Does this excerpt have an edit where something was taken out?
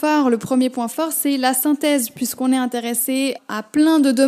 yes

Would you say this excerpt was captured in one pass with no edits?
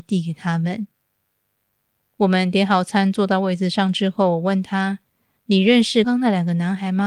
no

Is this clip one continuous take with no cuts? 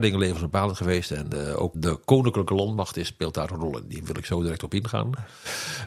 no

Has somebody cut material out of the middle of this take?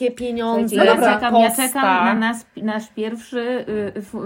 no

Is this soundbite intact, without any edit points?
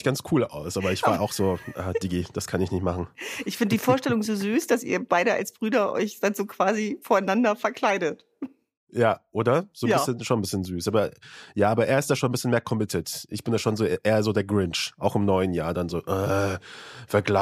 yes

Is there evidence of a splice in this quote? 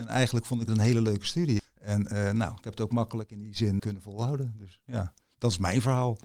yes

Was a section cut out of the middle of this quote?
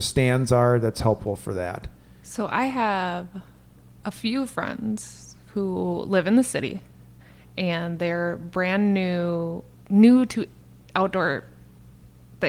yes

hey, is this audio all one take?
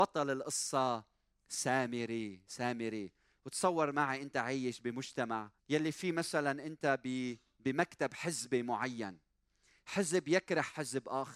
no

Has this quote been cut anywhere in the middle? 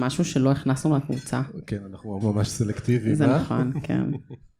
yes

